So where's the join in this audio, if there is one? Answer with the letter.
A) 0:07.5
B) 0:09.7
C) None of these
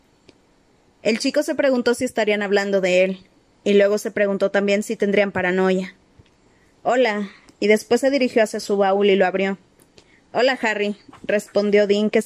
A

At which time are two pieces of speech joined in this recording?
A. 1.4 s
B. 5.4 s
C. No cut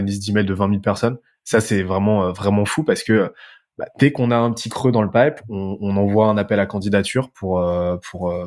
C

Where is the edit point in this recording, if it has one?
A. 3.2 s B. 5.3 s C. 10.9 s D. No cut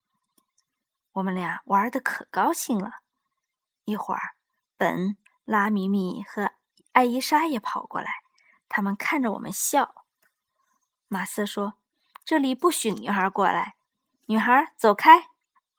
B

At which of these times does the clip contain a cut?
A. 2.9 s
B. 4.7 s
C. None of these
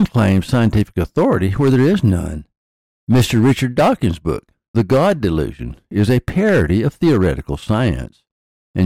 C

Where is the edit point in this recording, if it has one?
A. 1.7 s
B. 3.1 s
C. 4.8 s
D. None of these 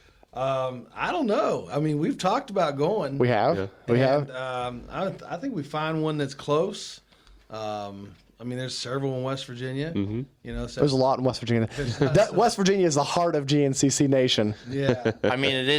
D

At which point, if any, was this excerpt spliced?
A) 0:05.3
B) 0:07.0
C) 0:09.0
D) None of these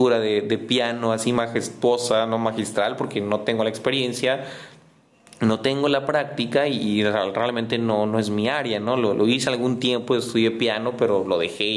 D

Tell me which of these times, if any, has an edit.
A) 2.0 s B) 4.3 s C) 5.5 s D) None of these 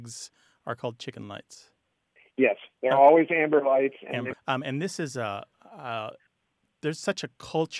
B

